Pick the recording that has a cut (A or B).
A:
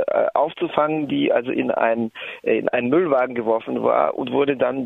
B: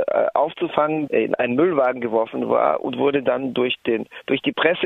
B